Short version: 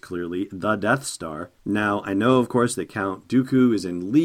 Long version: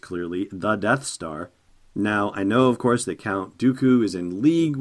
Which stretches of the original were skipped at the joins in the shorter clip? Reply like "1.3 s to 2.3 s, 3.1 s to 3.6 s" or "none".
1.6 s to 1.9 s